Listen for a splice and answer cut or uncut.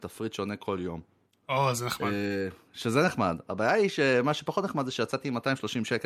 uncut